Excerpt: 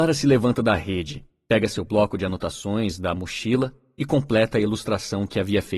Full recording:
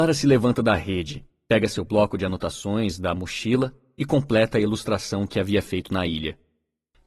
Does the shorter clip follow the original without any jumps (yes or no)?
yes